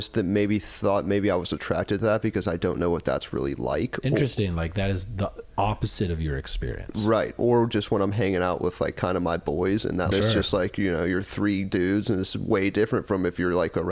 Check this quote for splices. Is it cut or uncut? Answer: cut